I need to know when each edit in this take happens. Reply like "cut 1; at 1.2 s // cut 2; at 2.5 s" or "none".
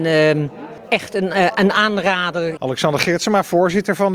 cut 1; at 2.6 s